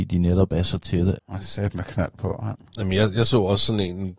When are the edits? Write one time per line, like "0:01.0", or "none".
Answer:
0:01.2